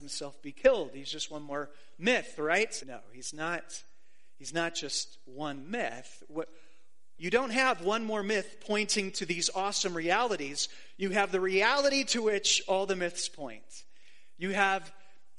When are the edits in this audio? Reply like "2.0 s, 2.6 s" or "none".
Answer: 2.8 s, 7.2 s